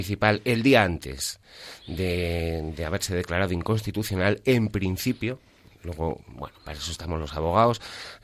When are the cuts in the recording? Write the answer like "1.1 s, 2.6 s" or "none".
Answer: none